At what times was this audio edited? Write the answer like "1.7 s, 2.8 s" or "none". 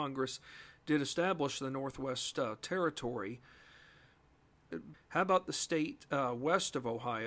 4.9 s